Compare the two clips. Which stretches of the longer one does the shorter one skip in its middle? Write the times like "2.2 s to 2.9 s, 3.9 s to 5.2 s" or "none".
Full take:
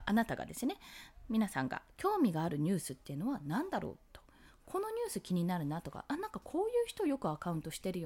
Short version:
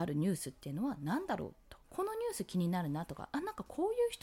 4.3 s to 4.6 s